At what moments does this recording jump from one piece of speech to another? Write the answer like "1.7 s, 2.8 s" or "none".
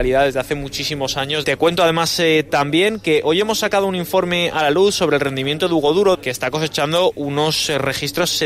1.4 s, 6.1 s